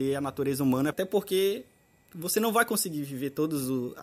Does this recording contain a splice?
yes; 1 cut; at 0.9 s

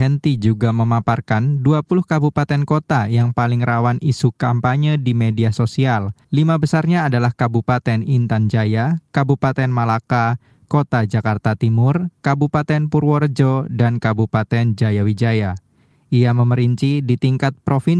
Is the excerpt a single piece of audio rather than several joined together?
no; 1 cut; at 6.2 s

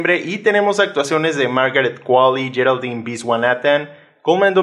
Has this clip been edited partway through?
no; 0 cuts

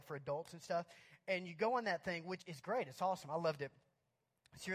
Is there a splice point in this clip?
yes; 1 cut; at 2.4 s

